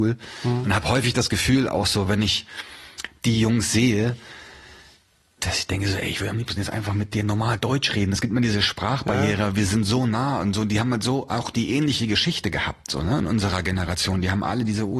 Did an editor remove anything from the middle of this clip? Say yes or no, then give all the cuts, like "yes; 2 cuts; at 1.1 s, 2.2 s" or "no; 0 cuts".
no; 0 cuts